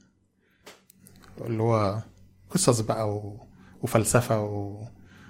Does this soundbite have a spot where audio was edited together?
no; 0 cuts

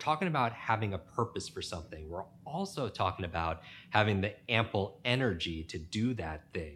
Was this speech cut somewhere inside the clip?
no; 0 cuts

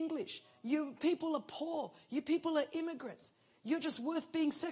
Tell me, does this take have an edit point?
no; 0 cuts

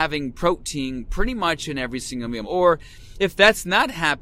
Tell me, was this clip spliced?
yes; 1 cut; at 2.4 s

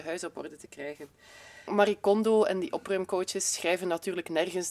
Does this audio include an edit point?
no; 0 cuts

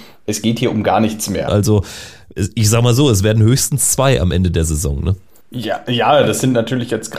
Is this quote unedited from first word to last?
no; 1 cut; at 1.5 s

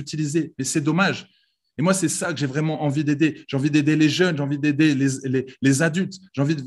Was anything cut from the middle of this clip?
no; 0 cuts

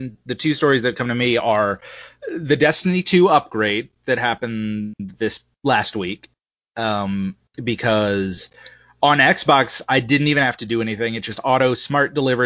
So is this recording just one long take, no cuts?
yes; 0 cuts

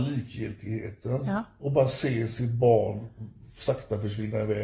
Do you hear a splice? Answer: no; 0 cuts

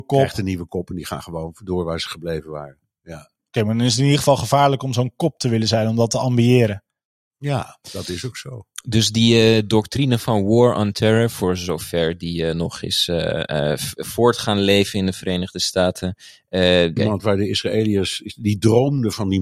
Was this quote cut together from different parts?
yes; 2 cuts; at 7.8 s, 17.0 s

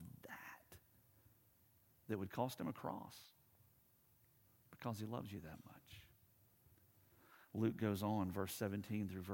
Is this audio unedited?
yes; 0 cuts

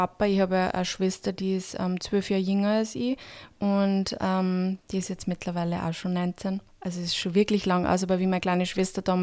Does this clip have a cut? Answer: no; 0 cuts

